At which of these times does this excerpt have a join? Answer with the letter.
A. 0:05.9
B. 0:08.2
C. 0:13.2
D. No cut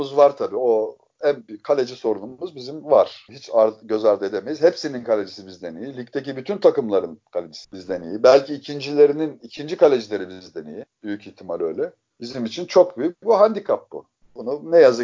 D